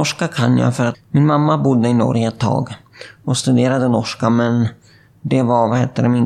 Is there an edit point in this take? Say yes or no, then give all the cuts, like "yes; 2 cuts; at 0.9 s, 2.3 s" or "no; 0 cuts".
yes; 1 cut; at 0.9 s